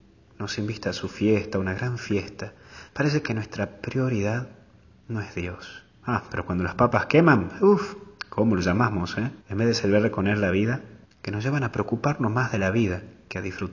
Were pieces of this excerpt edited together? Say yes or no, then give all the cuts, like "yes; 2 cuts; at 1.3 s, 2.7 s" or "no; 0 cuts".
yes; 3 cuts; at 2.9 s, 9.4 s, 11.0 s